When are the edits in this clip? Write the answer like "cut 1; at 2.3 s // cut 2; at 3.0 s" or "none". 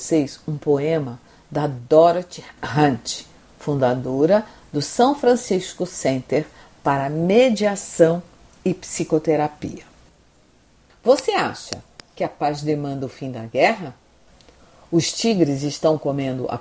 cut 1; at 10.9 s